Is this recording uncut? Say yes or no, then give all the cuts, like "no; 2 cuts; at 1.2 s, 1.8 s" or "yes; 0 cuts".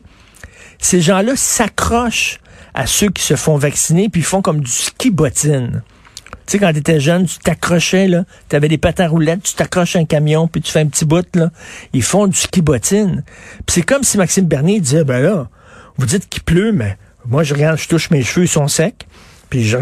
yes; 0 cuts